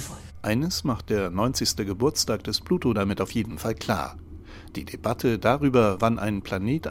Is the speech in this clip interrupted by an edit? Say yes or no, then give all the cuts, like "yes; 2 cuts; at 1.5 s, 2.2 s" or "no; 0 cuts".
no; 0 cuts